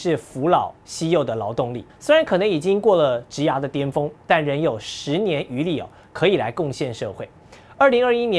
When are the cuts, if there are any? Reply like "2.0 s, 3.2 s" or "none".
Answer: 1.9 s